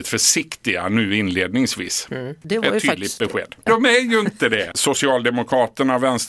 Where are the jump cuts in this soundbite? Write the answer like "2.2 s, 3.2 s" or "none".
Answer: 2.4 s, 3.7 s, 4.7 s

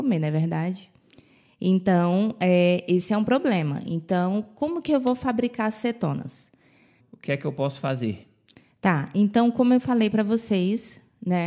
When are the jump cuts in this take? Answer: 7.0 s

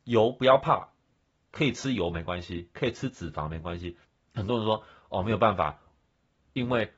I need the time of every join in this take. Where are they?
4.3 s, 5.9 s

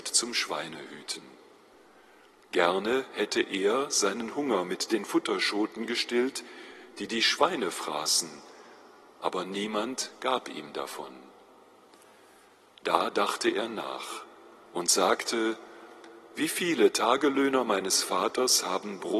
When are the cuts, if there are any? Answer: none

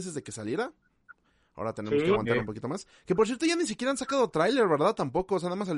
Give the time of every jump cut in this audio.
none

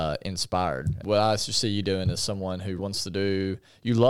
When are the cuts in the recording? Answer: 1.0 s, 2.8 s

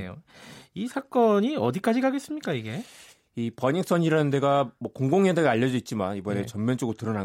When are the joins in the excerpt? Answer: none

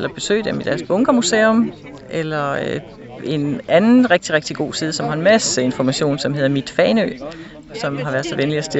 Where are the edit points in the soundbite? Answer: none

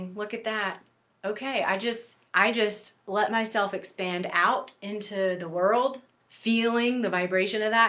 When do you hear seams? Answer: 2.3 s, 6.2 s

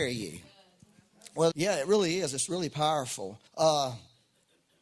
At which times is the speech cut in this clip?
1.5 s, 3.5 s

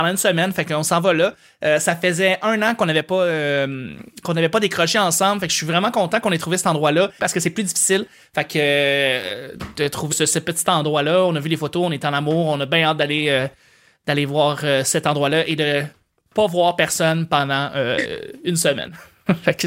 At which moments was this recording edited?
7.2 s, 10.1 s

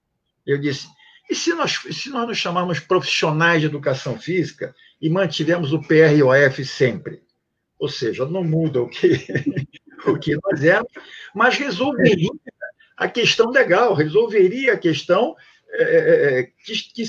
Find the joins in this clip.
none

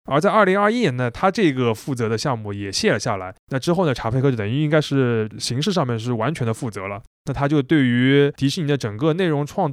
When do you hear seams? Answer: none

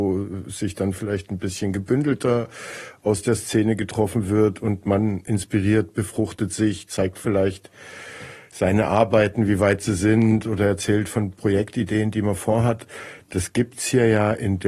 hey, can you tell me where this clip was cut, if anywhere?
6.9 s

